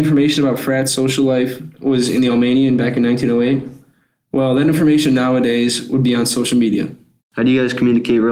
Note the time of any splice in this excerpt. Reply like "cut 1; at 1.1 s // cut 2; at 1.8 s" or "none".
cut 1; at 7.2 s